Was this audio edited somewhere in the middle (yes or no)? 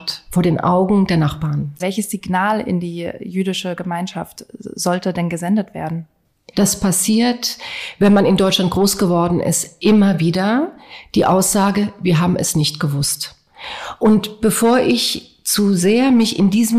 yes